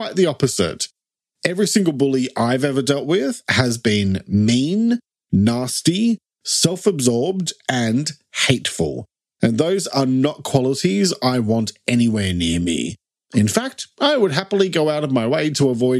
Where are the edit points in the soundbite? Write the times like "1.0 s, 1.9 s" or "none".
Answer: none